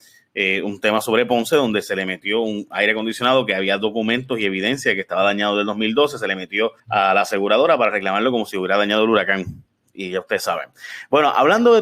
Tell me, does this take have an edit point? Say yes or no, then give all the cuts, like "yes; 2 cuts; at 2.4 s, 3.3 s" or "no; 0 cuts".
yes; 1 cut; at 6.8 s